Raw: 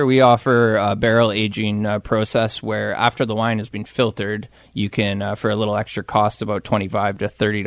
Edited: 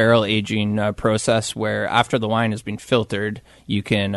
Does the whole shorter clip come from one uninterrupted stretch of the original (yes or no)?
yes